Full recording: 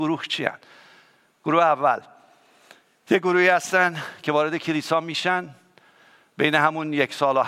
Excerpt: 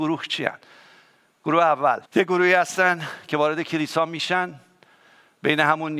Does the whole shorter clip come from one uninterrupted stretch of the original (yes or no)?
no